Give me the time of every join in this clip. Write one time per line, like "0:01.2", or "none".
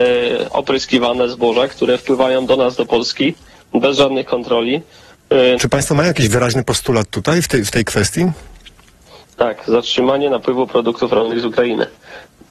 0:05.6

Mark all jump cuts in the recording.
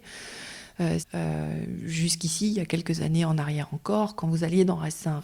0:01.0

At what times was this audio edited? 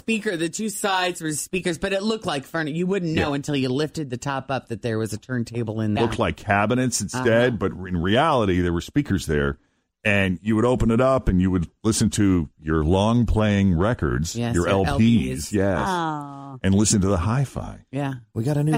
0:06.0

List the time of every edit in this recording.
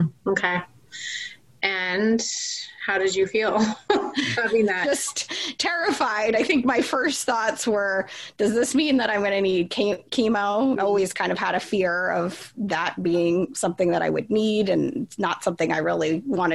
0:10.8

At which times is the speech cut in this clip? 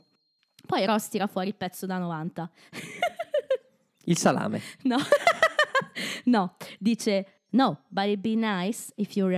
none

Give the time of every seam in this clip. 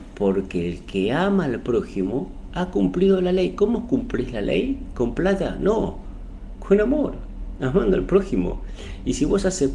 none

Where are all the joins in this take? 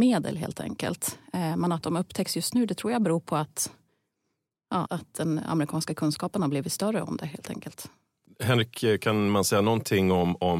0:04.9
0:08.3

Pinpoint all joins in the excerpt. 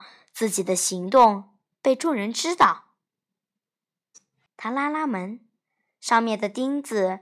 0:04.5

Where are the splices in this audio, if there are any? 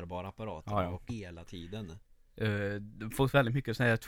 0:01.1

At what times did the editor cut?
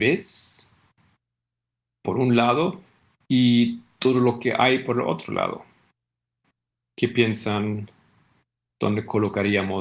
none

